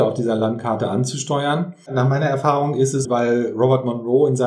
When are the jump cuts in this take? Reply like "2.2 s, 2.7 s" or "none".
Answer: 1.9 s, 3.0 s